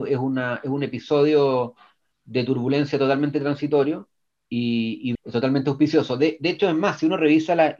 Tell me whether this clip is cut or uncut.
cut